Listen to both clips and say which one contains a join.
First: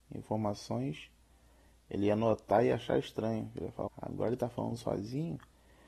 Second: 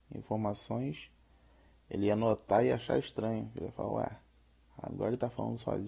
first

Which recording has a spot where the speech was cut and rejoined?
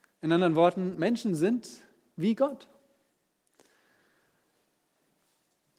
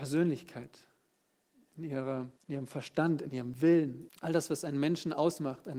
second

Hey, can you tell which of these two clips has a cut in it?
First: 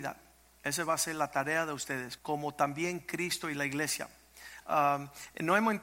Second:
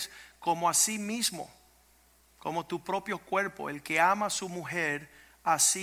first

